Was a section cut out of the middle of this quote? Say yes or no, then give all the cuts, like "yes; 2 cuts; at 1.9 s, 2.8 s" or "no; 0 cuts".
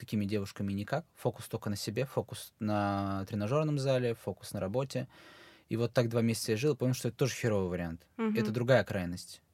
no; 0 cuts